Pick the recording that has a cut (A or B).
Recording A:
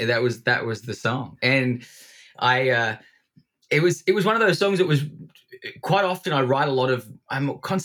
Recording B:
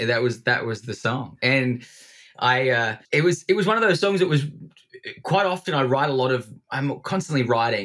B